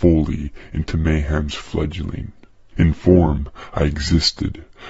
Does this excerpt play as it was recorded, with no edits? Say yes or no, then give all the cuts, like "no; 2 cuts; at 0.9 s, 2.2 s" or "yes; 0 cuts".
no; 1 cut; at 2.7 s